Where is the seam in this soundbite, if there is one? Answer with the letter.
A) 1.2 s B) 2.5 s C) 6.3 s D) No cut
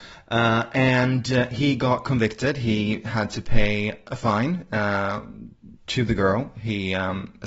D